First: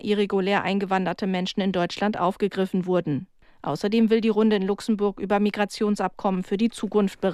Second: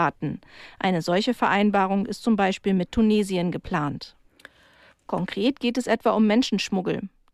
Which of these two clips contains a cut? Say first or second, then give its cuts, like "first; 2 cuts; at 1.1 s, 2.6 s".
second; 1 cut; at 4.9 s